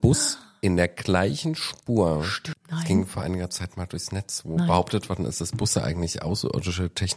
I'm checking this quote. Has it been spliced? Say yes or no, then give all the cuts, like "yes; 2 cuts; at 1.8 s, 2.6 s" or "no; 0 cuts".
yes; 1 cut; at 2.5 s